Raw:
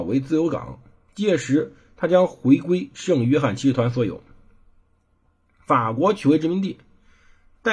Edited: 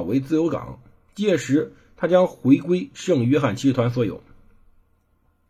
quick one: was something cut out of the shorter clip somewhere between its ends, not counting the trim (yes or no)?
no